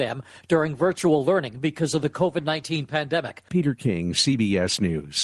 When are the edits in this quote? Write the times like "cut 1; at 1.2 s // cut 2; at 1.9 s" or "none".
cut 1; at 3.5 s